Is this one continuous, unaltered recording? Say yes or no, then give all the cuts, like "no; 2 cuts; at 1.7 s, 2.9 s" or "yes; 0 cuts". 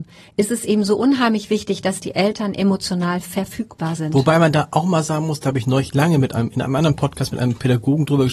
yes; 0 cuts